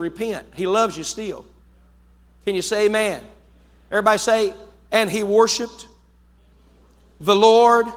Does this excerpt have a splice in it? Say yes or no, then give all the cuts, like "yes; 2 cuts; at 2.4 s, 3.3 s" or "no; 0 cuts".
no; 0 cuts